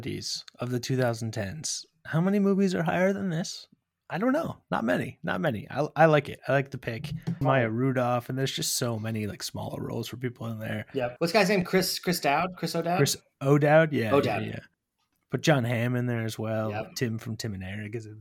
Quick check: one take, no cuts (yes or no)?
no